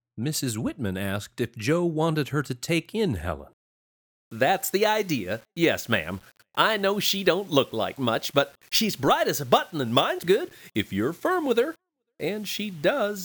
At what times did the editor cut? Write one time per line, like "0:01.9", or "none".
0:10.2